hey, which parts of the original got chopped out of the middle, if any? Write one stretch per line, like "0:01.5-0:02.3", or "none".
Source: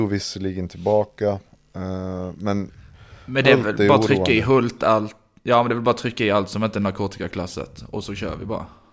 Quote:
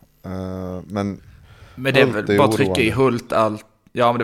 none

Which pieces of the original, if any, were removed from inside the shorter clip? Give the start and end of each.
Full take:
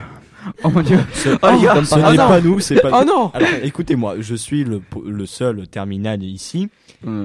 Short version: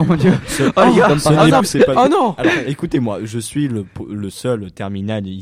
0:02.3-0:02.6

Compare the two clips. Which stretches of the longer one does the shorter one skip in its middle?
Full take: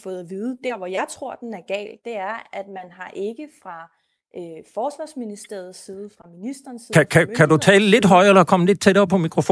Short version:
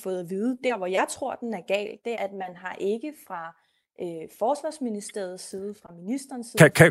0:02.1-0:02.5

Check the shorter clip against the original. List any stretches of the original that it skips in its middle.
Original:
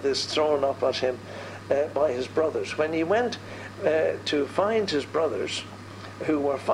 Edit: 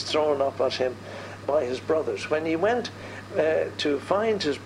0:01.6-0:01.9

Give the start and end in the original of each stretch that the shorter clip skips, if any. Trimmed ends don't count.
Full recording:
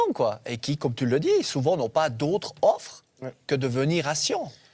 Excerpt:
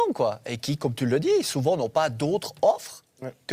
none

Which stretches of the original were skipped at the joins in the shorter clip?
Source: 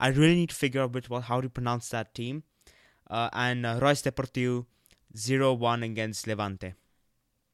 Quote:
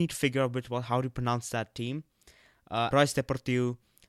0:03.3-0:03.8

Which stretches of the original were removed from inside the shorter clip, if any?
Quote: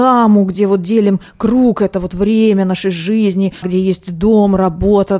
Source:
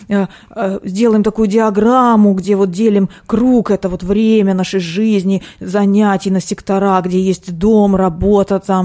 0:05.5-0:07.0

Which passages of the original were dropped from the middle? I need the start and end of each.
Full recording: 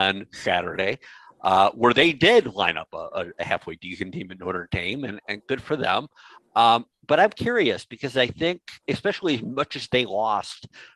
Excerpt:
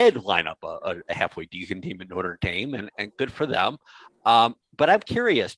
none

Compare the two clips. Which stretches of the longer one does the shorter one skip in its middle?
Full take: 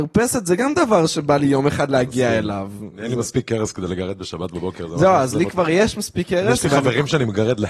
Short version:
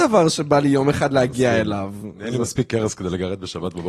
none

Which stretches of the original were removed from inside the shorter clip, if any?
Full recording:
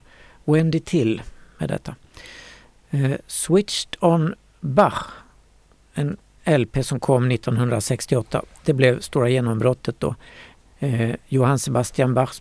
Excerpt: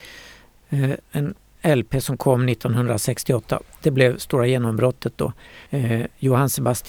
0:03.2-0:05.8
0:10.5-0:10.8

